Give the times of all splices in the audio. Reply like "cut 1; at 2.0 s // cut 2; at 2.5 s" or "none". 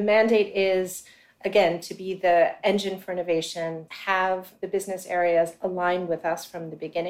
cut 1; at 3.9 s